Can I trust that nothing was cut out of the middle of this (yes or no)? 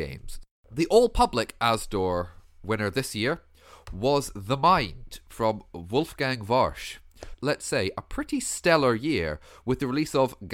no